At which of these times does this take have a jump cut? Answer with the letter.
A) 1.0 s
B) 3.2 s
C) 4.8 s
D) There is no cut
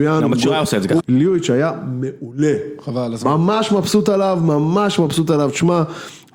A